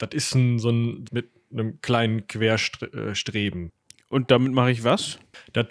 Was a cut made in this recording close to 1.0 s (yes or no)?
yes